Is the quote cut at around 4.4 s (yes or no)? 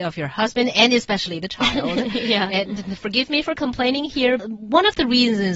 yes